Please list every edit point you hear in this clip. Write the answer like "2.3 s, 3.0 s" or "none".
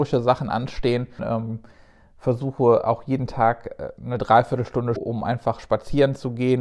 1.2 s, 5.0 s